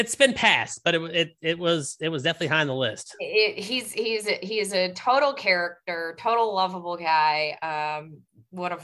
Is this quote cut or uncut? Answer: uncut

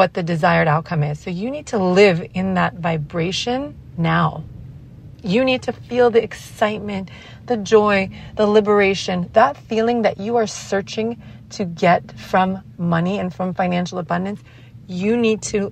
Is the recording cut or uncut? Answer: uncut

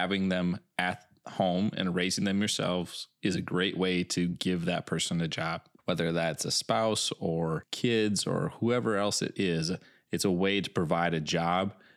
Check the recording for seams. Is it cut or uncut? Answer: uncut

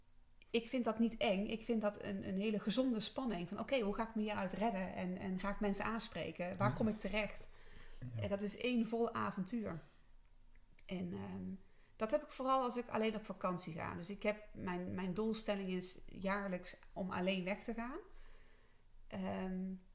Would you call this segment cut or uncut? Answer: uncut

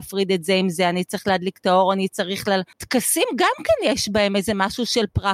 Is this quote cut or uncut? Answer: cut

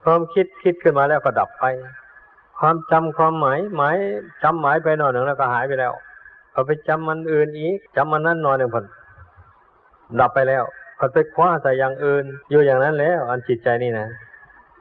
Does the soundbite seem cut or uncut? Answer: cut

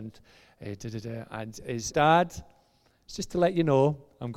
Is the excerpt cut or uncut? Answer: cut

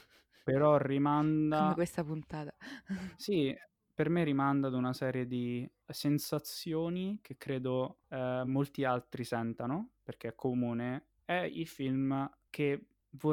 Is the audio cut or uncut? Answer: uncut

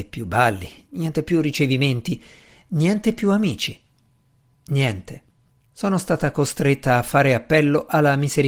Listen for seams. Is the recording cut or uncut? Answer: cut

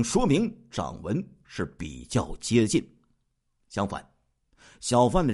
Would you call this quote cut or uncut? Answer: uncut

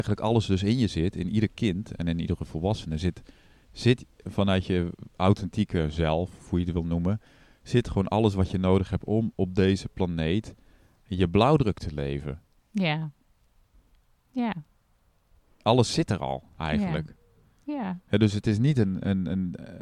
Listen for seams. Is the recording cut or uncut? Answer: uncut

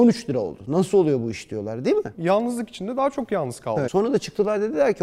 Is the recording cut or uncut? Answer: cut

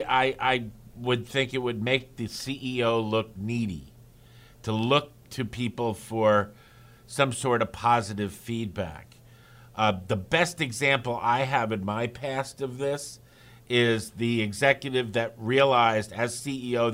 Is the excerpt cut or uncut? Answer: uncut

